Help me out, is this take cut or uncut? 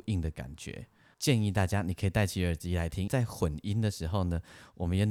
cut